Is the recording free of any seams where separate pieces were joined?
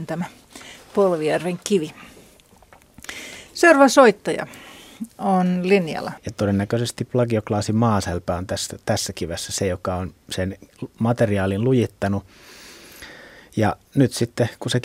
no; 1 cut; at 6.2 s

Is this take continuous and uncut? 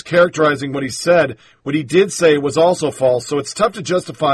yes; 0 cuts

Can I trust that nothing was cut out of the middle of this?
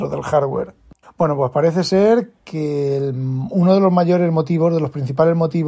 no; 1 cut; at 1.0 s

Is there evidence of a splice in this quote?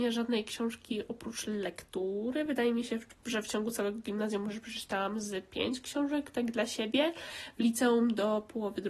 no; 0 cuts

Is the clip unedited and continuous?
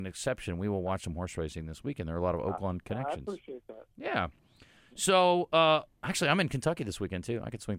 yes; 0 cuts

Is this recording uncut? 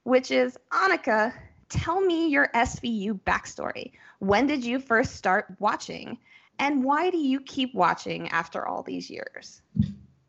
yes; 0 cuts

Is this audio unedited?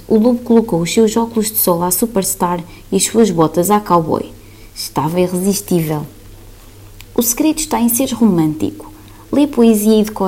yes; 0 cuts

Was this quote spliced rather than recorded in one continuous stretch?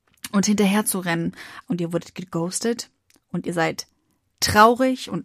yes; 1 cut; at 1.6 s

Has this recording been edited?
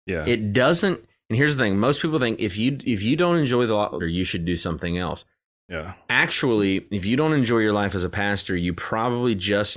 yes; 1 cut; at 4.0 s

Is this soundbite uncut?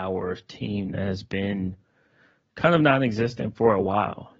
yes; 0 cuts

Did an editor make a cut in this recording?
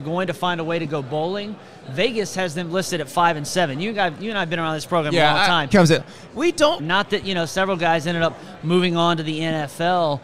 yes; 2 cuts; at 5.7 s, 6.8 s

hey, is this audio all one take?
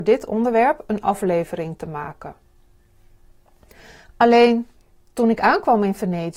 yes; 0 cuts

